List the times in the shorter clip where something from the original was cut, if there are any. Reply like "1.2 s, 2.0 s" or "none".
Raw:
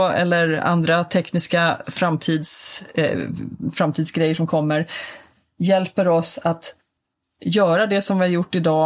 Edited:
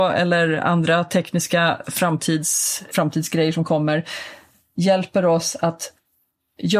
2.9 s